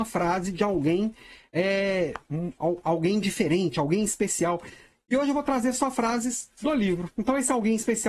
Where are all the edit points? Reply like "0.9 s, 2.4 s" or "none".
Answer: none